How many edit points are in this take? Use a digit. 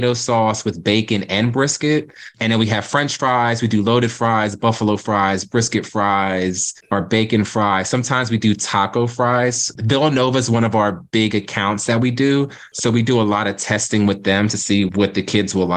0